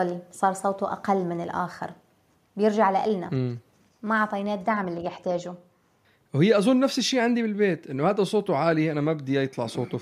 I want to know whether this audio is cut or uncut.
uncut